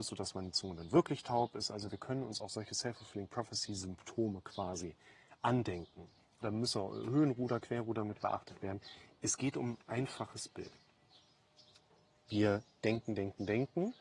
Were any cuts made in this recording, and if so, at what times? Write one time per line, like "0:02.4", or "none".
0:06.4